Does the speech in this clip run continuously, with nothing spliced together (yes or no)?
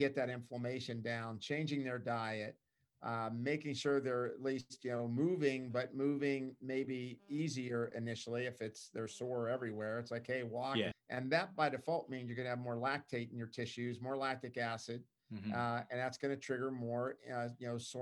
no